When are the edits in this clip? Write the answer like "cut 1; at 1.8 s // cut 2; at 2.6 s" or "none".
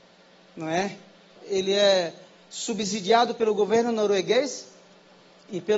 cut 1; at 1.4 s